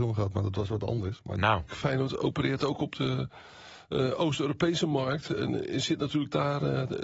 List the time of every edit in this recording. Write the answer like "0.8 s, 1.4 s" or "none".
1.7 s